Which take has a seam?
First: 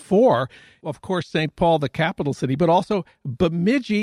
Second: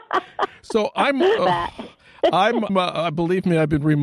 second; 2 cuts; at 1.4 s, 2.7 s

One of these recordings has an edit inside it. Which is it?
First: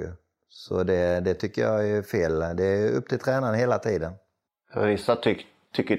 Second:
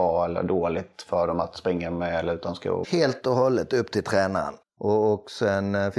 second; 2 cuts; at 2.8 s, 4.6 s

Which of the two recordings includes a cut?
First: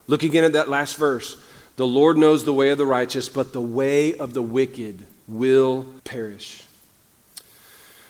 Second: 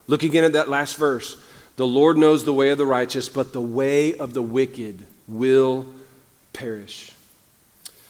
first; 1 cut; at 6.0 s

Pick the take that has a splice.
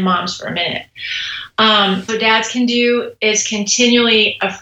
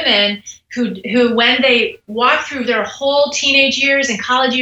first; 1 cut; at 2.1 s

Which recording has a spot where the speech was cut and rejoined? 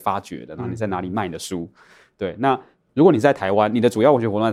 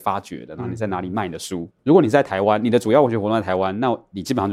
second; 1 cut; at 1.7 s

